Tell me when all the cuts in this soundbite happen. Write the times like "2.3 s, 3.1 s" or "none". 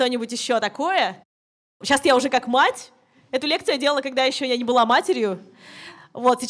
none